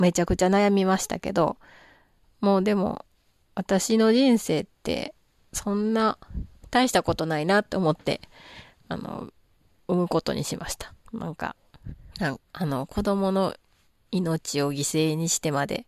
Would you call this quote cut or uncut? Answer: cut